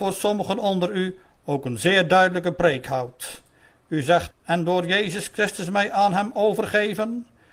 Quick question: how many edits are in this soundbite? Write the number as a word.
one